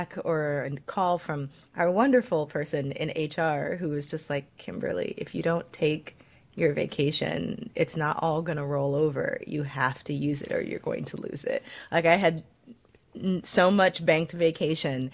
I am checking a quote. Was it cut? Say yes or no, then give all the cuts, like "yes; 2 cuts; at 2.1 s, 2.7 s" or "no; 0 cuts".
no; 0 cuts